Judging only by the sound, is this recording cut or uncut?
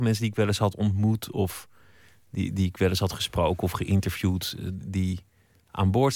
uncut